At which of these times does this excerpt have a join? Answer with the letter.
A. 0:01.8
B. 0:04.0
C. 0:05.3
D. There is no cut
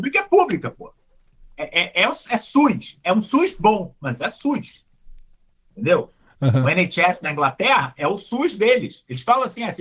D